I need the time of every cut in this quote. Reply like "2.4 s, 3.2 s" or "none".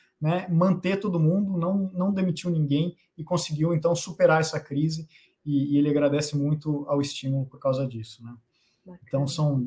none